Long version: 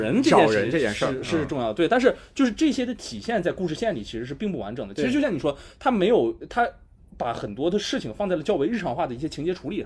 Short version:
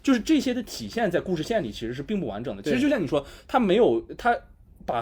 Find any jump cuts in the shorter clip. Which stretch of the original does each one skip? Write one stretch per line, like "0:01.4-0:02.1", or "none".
none